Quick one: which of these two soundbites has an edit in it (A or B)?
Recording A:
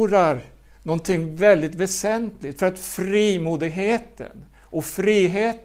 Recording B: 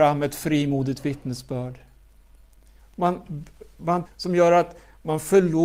B